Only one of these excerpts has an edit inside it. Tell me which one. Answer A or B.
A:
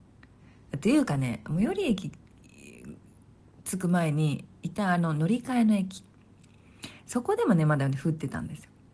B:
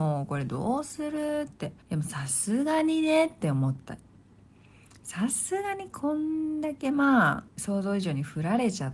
B